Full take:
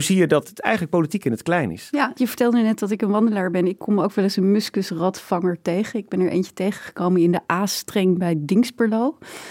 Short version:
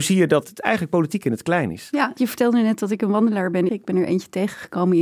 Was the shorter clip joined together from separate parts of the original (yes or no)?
yes